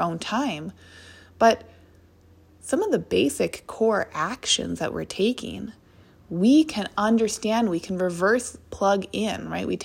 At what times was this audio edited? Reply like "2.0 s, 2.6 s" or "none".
none